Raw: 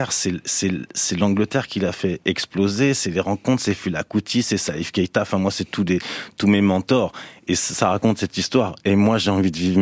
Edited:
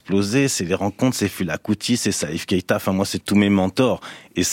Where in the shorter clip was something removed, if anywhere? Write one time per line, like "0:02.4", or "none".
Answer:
0:03.2